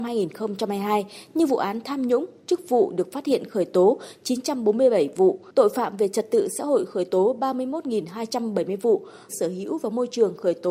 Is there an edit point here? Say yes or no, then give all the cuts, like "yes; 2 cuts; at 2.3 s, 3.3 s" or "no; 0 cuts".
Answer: yes; 1 cut; at 9.3 s